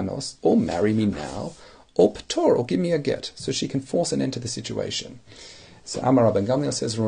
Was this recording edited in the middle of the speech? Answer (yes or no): no